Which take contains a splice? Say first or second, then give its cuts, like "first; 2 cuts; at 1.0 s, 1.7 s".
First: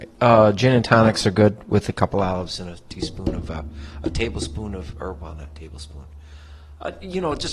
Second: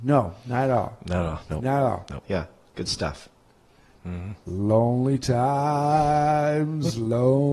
second; 2 cuts; at 2.2 s, 3.9 s